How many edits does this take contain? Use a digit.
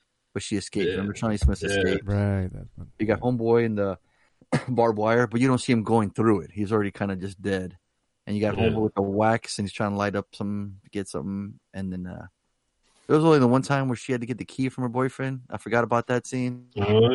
0